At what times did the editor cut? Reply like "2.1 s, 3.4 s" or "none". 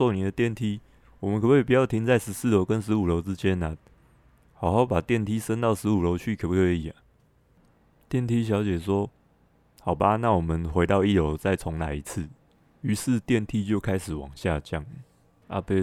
none

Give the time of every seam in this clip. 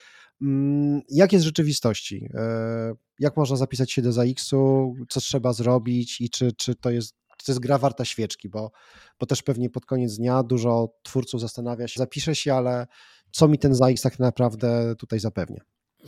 12.0 s

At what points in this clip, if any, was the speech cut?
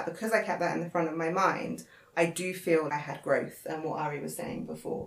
2.9 s

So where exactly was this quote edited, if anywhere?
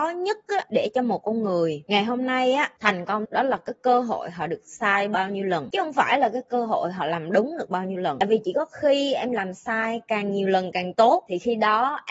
3.2 s

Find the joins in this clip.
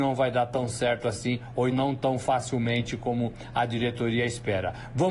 1.7 s

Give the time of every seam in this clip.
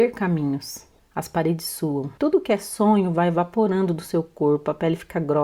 1.0 s, 2.2 s

